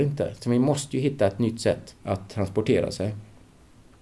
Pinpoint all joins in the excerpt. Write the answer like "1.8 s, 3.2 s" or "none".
2.0 s